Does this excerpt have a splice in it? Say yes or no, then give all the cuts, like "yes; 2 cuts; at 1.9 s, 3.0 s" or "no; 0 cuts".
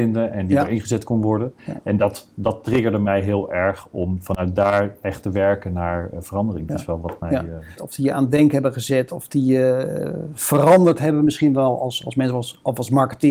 yes; 3 cuts; at 1.6 s, 6.7 s, 7.8 s